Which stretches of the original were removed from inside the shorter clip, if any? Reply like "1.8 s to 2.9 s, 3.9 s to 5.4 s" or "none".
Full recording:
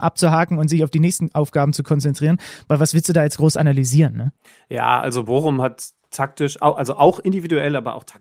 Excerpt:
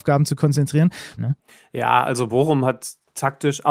2.6 s to 4.1 s